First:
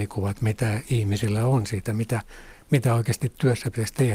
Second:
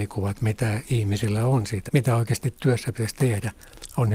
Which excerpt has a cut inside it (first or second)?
second